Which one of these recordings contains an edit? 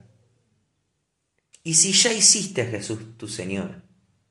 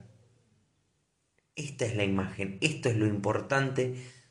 first; 1 cut; at 1.5 s

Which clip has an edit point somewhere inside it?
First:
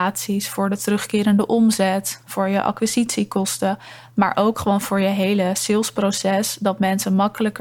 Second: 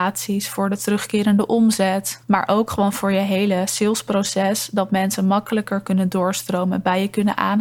second; 1 cut; at 2.2 s

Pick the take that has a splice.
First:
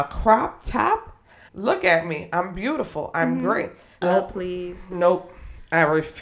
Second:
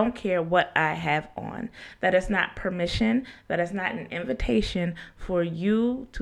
first; 2 cuts; at 1.5 s, 4.0 s

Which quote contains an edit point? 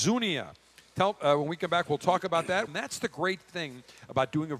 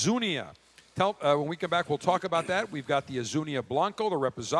first; 1 cut; at 2.7 s

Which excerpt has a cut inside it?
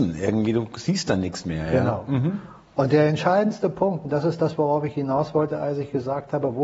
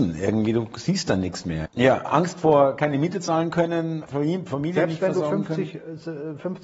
second; 2 cuts; at 1.7 s, 4.1 s

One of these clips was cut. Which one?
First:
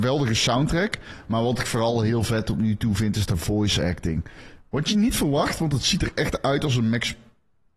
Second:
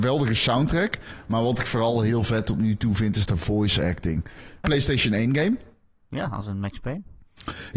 second; 1 cut; at 4.6 s

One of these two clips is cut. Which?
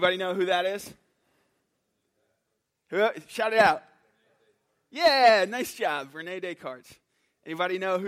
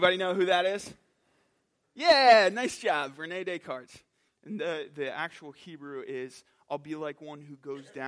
second; 2 cuts; at 1.8 s, 4.3 s

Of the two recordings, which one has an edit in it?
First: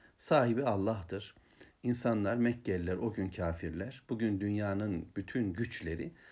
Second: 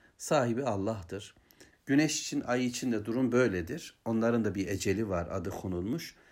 second; 1 cut; at 1.7 s

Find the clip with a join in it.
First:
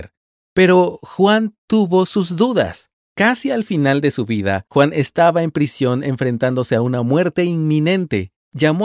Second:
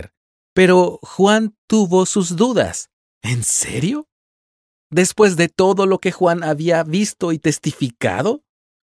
second; 1 cut; at 3.0 s

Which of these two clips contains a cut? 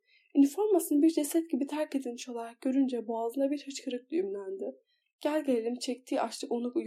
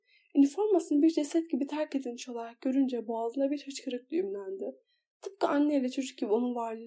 first; 1 cut; at 5.0 s

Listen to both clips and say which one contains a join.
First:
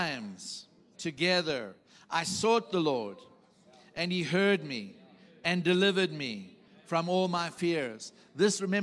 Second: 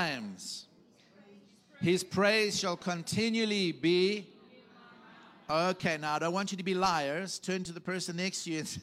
first; 1 cut; at 0.9 s

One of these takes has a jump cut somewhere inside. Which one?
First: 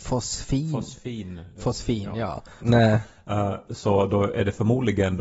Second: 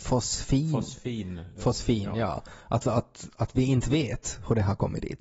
first; 1 cut; at 2.6 s

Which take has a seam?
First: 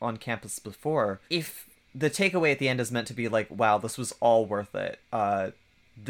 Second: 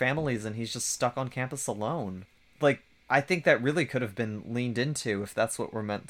first; 1 cut; at 1.3 s

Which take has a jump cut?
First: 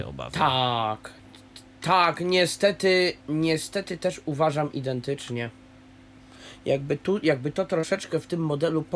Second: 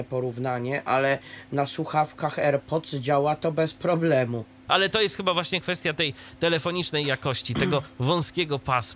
second; 1 cut; at 4.7 s

